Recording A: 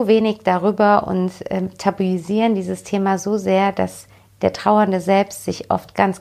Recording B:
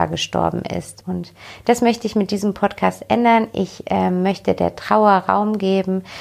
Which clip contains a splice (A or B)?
B